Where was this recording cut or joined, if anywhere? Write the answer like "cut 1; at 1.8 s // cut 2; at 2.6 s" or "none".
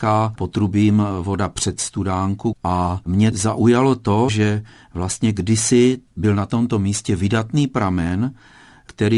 cut 1; at 4.3 s